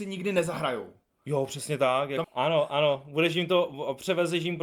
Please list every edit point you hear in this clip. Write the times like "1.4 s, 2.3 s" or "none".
2.2 s